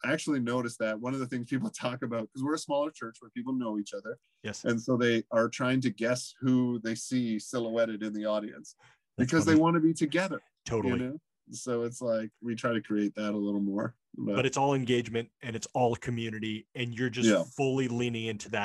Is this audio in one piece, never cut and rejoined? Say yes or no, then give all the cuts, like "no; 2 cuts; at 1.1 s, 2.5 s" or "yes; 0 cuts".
yes; 0 cuts